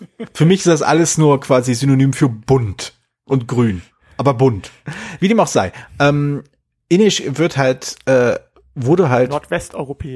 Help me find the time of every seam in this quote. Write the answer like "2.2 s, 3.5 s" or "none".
none